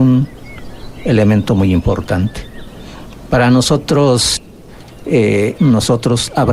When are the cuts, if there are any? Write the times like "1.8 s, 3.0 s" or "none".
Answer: 5.5 s